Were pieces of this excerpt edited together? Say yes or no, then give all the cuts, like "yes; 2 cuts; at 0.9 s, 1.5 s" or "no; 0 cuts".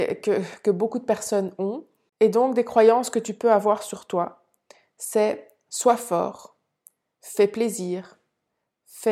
no; 0 cuts